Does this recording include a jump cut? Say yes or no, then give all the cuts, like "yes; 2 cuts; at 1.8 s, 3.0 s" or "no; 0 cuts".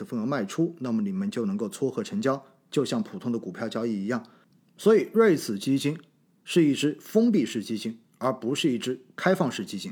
no; 0 cuts